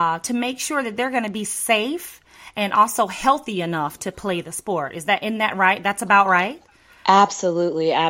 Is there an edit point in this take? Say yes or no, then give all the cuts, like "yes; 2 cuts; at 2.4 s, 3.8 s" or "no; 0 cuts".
no; 0 cuts